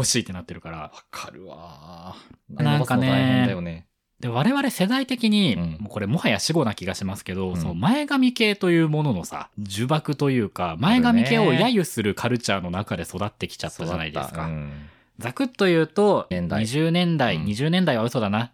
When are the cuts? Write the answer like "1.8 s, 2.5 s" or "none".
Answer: 2.6 s, 9.5 s, 16.3 s